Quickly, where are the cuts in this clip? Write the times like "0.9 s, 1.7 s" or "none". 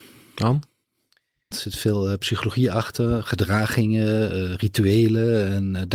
1.5 s